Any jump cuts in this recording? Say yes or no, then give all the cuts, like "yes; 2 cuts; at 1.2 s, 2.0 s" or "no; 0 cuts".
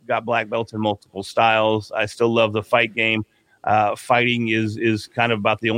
no; 0 cuts